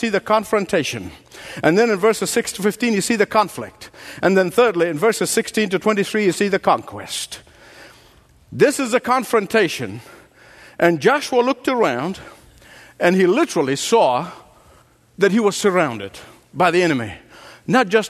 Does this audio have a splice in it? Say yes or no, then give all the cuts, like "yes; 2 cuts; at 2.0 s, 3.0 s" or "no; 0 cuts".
no; 0 cuts